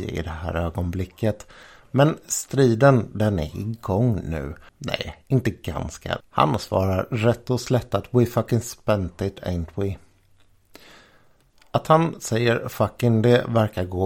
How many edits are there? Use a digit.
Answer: 2